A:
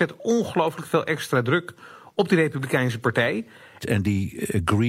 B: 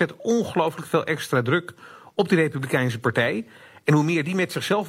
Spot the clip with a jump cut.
A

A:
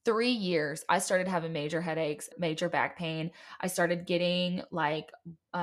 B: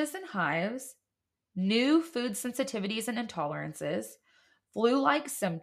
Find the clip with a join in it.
A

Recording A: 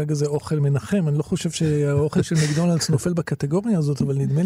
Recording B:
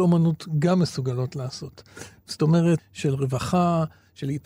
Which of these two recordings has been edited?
B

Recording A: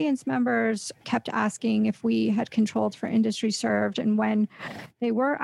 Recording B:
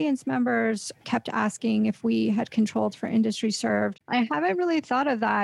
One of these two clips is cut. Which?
B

